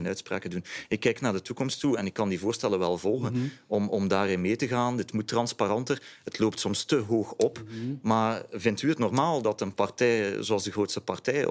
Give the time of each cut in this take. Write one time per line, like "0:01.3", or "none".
none